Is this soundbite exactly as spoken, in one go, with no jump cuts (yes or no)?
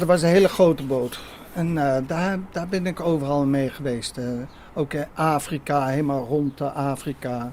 yes